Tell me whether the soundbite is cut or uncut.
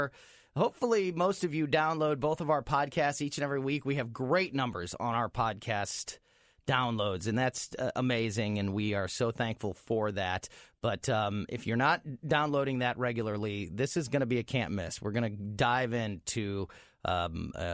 uncut